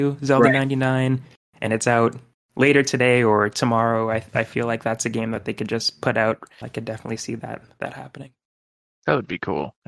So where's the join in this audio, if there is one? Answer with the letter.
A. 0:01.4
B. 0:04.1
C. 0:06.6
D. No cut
C